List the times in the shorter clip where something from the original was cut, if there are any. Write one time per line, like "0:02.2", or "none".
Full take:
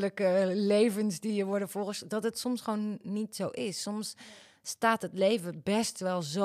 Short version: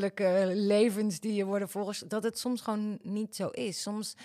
none